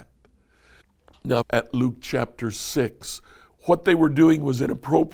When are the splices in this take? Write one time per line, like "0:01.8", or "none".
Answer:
0:01.4
0:03.5